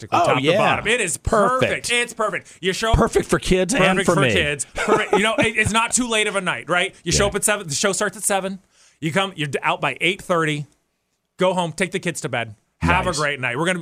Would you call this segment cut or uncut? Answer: uncut